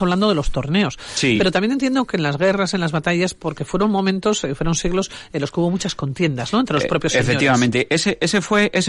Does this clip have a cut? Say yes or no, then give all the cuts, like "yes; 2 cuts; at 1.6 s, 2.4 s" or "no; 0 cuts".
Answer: no; 0 cuts